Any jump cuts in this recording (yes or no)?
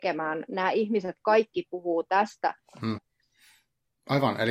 yes